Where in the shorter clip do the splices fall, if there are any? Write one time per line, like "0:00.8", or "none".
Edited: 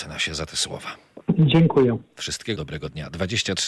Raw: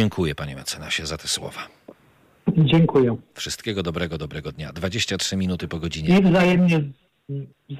0:01.2
0:02.6